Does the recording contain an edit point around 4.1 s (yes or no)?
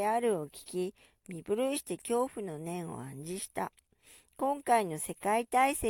no